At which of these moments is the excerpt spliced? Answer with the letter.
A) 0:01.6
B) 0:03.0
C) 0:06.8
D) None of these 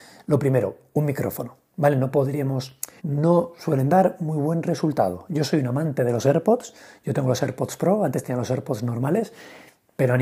B